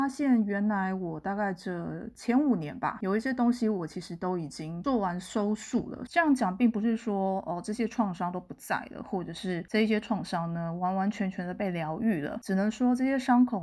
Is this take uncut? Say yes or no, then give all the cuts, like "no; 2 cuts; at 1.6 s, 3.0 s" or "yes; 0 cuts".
no; 1 cut; at 6.1 s